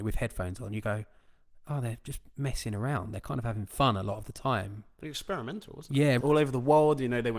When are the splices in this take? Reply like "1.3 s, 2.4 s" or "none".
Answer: 6.2 s